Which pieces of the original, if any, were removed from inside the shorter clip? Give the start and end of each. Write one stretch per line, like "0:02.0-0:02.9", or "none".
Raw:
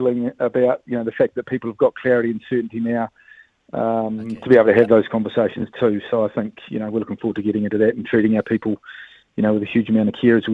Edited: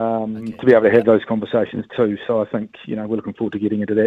none

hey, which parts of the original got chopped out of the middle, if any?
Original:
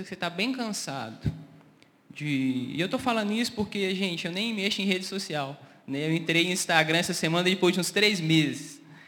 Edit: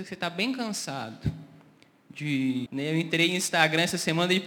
0:02.7-0:05.8

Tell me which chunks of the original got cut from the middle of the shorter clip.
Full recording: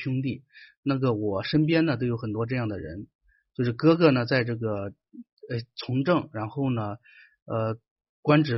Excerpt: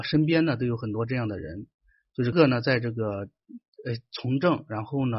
0:03.7-0:04.0

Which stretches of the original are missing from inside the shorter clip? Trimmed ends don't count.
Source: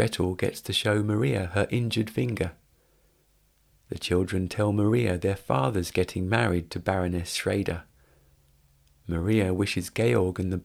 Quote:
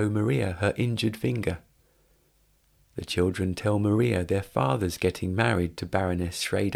none

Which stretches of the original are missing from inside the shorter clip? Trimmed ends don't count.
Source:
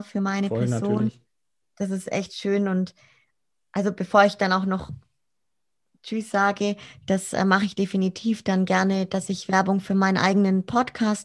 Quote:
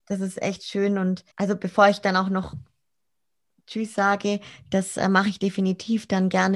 0:03.0-0:03.7

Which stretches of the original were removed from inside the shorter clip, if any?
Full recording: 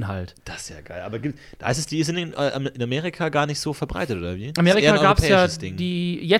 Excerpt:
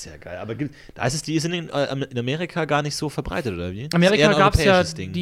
none

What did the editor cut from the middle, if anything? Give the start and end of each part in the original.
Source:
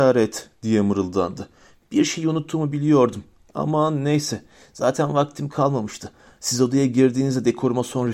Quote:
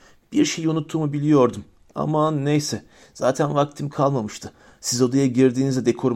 none

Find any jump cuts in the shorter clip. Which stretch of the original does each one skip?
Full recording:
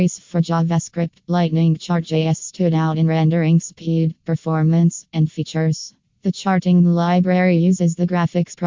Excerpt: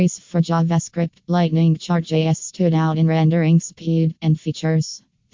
0:04.2-0:05.1

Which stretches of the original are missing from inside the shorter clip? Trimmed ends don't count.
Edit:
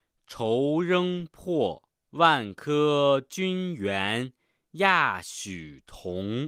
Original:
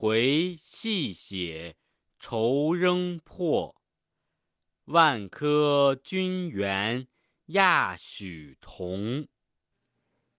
0:03.9-0:04.8

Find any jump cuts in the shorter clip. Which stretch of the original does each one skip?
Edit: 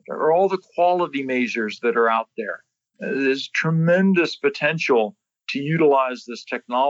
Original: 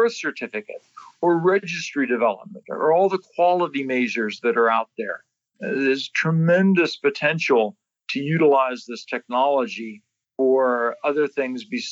none

